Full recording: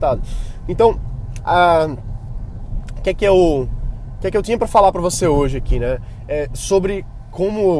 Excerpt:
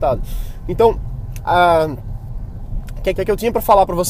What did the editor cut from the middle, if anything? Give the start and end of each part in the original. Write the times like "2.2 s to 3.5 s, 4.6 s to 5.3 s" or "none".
3.2 s to 4.2 s